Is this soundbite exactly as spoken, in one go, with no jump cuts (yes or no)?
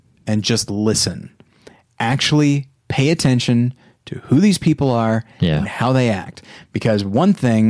yes